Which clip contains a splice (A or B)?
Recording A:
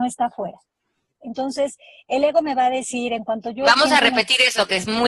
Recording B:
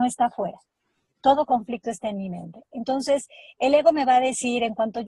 A